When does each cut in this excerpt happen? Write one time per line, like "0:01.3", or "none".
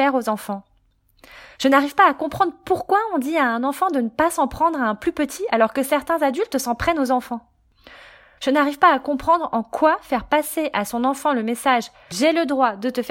0:08.4